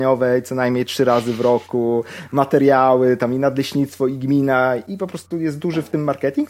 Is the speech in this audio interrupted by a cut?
no; 0 cuts

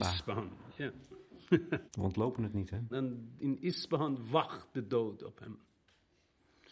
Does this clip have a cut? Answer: yes; 2 cuts; at 1.9 s, 2.9 s

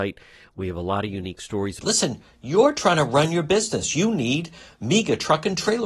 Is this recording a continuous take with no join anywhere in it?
no; 1 cut; at 1.8 s

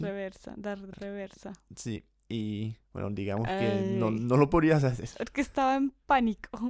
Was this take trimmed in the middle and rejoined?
yes; 1 cut; at 2.8 s

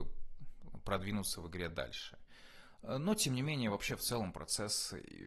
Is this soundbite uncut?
yes; 0 cuts

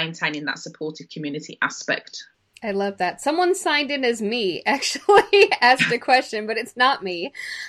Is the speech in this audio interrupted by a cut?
no; 0 cuts

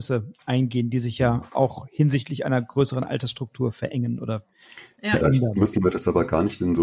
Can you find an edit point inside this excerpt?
no; 0 cuts

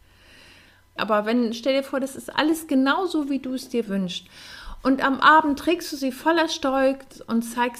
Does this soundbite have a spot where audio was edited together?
yes; 1 cut; at 1.0 s

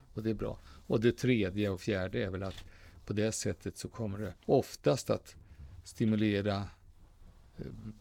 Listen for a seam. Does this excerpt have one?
yes; 1 cut; at 4.4 s

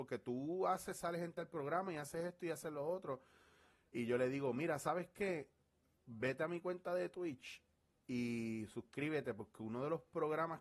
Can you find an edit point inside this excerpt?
no; 0 cuts

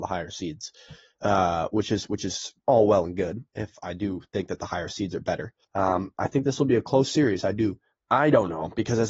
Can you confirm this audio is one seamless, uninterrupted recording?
no; 3 cuts; at 2.6 s, 5.6 s, 8.0 s

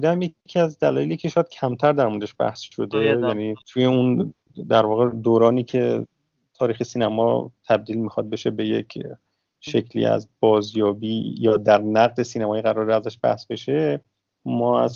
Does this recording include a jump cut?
yes; 1 cut; at 3.6 s

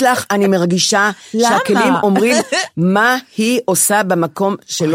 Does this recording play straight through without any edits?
yes; 0 cuts

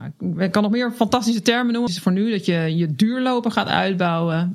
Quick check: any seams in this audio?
yes; 1 cut; at 1.9 s

